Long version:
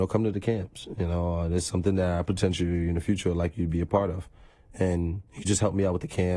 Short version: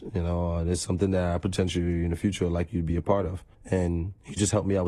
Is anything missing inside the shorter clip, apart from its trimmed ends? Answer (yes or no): yes